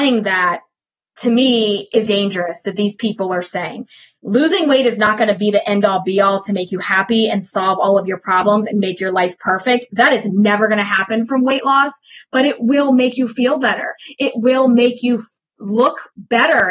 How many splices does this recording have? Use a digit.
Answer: 1